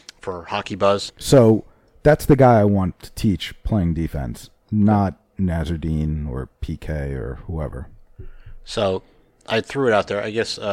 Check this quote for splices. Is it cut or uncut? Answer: cut